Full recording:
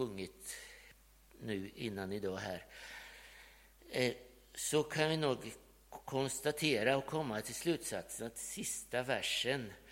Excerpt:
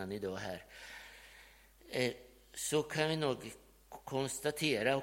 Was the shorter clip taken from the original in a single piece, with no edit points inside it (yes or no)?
yes